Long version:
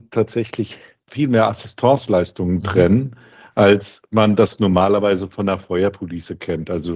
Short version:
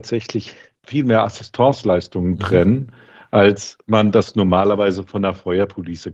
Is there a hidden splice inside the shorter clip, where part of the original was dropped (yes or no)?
no